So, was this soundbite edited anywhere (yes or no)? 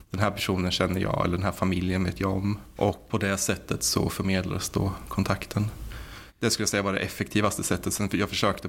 no